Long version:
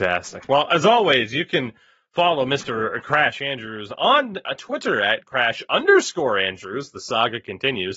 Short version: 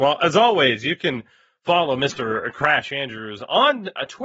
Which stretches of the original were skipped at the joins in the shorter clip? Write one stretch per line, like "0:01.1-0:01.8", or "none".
none